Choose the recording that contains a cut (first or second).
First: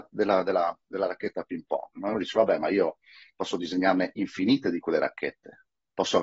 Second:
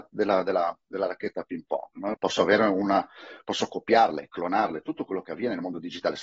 second